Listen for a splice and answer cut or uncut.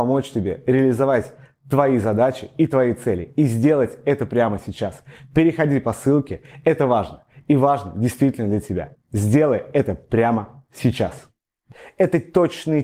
uncut